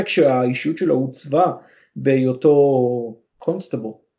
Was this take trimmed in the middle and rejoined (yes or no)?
yes